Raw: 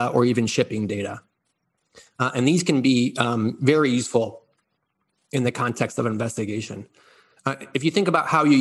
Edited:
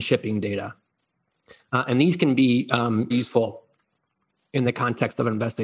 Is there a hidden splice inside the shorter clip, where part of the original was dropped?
yes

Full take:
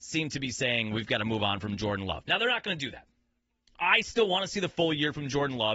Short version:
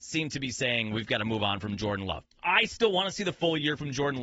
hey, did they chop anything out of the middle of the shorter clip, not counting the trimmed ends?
yes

